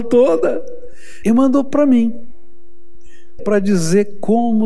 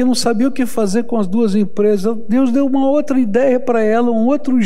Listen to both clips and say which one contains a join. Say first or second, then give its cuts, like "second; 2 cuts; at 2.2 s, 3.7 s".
first; 2 cuts; at 1.2 s, 3.4 s